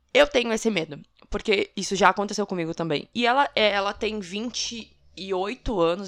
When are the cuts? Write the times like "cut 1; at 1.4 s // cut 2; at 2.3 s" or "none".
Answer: cut 1; at 3.1 s